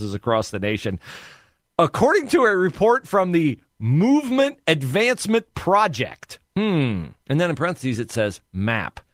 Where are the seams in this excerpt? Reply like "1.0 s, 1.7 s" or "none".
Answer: 6.5 s